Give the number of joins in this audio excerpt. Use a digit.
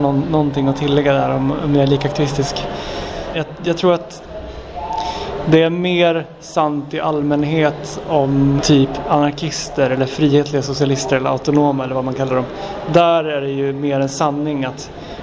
2